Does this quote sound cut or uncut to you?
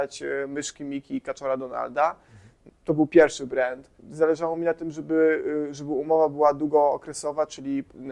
cut